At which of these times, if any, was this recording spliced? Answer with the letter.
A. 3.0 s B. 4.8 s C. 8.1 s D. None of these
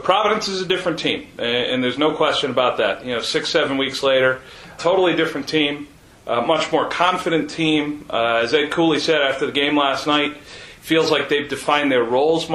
B